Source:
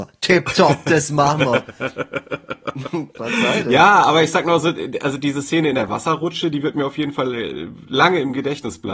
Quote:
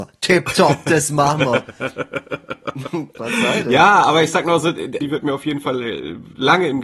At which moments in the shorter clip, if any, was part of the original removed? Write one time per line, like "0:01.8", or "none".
0:05.0